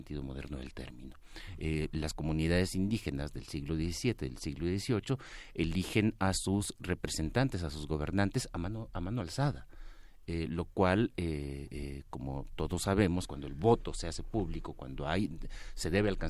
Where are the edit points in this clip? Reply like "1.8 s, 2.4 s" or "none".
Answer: 13.3 s

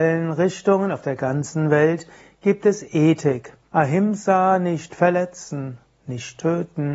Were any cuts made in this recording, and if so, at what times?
3.7 s

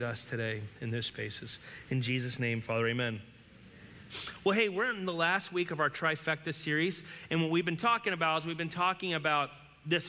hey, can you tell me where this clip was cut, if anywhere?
none

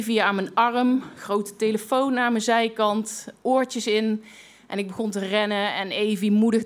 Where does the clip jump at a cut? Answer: none

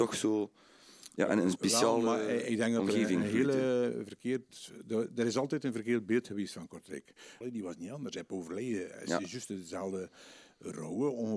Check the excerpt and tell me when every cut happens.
7.4 s

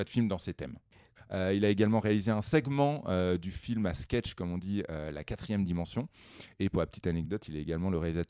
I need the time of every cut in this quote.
1.2 s

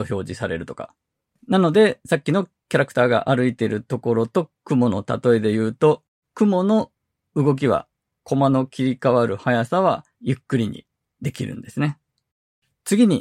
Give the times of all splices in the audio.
1.4 s, 6.2 s, 10.1 s

